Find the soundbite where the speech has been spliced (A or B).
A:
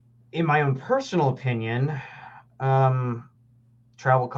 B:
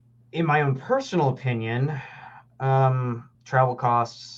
B